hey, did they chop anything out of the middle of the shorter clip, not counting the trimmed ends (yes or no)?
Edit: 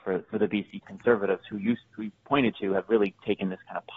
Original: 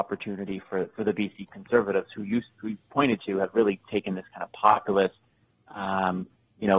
no